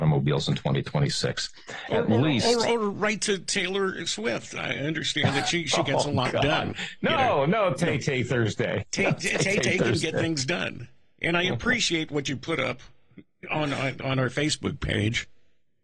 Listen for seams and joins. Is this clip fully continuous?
yes; 0 cuts

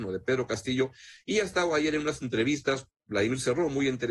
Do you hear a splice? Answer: no; 0 cuts

